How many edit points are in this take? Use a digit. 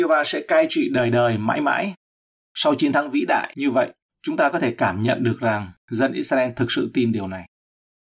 0